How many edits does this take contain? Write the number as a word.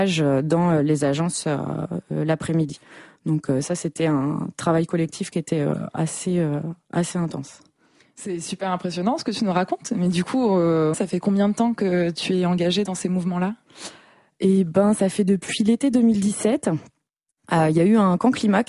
one